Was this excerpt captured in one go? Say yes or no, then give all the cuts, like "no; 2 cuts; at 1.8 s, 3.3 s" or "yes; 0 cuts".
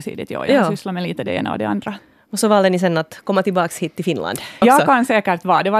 no; 1 cut; at 4.6 s